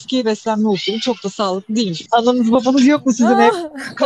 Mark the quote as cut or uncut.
cut